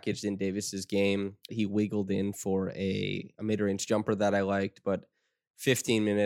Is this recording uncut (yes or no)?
no